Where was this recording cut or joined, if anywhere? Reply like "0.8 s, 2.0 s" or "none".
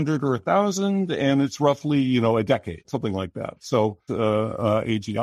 2.8 s, 4.1 s